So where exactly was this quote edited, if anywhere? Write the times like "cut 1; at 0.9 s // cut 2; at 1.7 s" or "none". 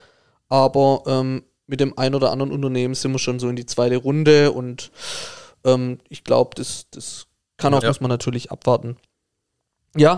cut 1; at 7.8 s